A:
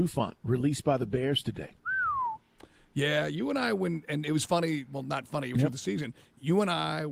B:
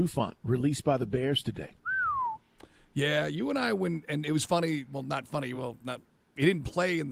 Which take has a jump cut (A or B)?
A